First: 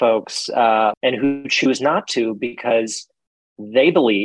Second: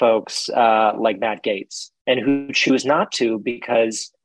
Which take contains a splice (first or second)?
first